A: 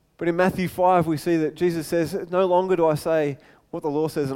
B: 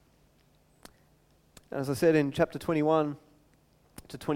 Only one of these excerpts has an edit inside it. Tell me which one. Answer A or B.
B